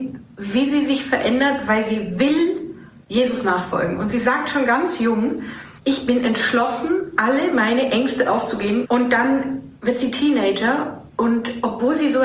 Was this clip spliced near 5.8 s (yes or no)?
yes